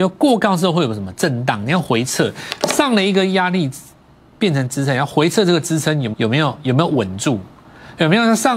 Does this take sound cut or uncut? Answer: cut